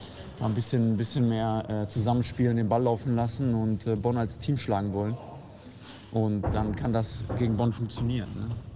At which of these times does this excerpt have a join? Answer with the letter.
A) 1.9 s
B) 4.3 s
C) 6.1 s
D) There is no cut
D